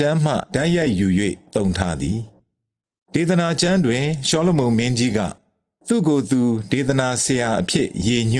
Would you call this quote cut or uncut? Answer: uncut